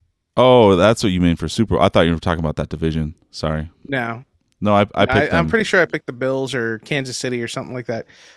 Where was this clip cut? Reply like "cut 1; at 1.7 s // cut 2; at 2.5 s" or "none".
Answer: none